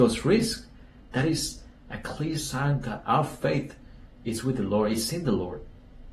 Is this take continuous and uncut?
yes; 0 cuts

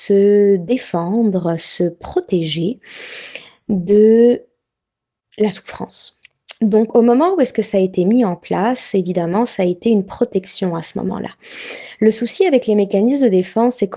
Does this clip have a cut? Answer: no; 0 cuts

